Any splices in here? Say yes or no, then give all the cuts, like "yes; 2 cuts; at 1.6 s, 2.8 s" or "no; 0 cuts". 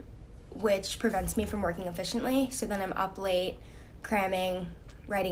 no; 0 cuts